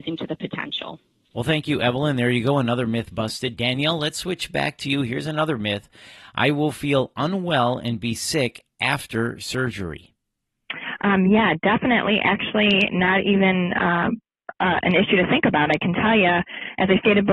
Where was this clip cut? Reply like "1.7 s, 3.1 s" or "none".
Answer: 3.5 s

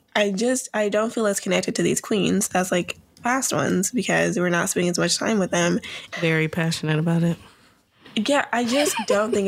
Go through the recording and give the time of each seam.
6.1 s

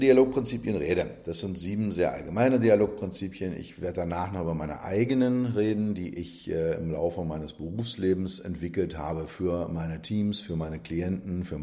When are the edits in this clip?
none

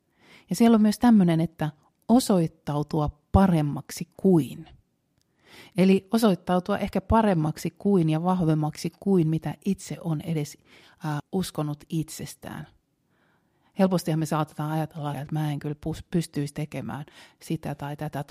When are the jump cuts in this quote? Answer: 11.2 s, 15.1 s

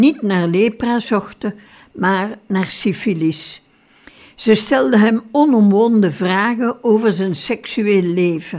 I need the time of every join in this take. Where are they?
none

